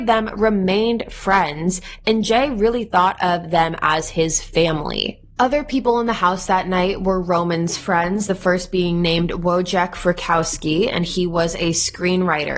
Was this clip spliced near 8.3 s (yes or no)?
no